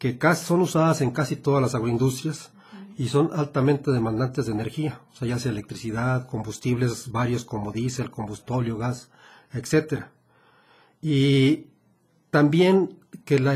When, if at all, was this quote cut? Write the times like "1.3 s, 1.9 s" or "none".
none